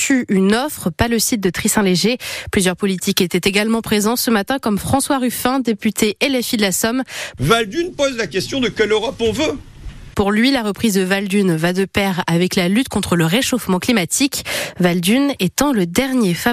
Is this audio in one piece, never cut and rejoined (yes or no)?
no